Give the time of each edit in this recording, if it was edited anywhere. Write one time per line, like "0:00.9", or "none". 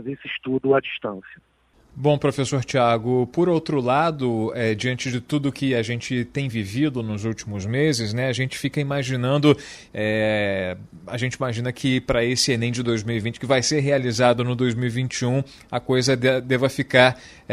0:09.9